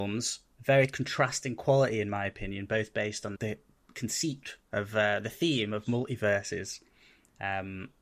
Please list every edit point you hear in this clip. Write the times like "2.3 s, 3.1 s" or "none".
3.3 s, 4.6 s